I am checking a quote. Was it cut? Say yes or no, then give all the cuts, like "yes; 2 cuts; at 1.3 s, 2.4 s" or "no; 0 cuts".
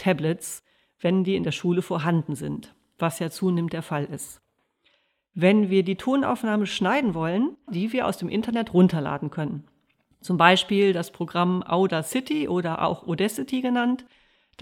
yes; 1 cut; at 7.7 s